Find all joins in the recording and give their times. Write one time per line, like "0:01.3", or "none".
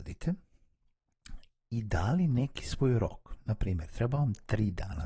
none